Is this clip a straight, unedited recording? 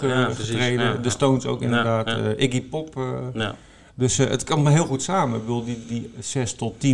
no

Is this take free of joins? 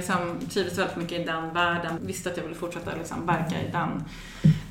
no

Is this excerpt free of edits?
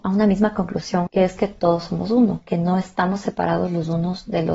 no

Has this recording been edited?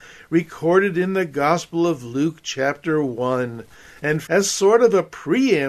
yes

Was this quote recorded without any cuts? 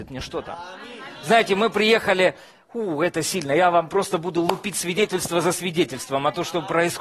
yes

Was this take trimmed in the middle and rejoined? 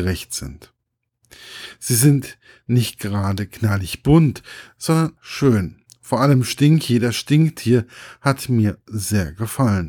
yes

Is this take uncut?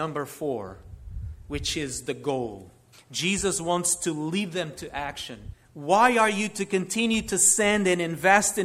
no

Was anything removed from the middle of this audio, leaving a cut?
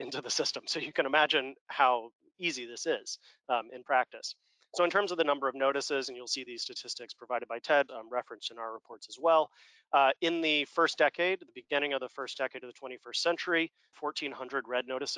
yes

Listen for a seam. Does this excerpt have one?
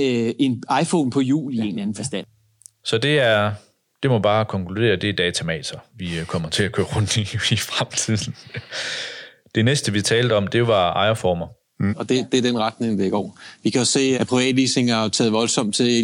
yes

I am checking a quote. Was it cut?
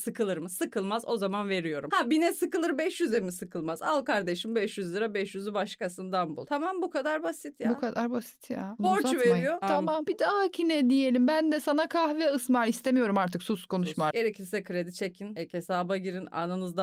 yes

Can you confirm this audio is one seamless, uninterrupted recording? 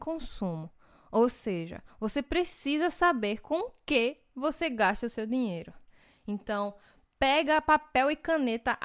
yes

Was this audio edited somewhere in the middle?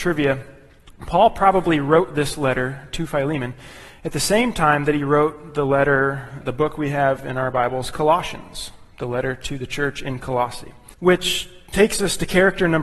yes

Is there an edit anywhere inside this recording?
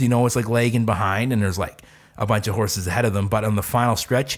no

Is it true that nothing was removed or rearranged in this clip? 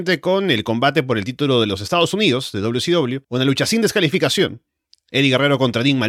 no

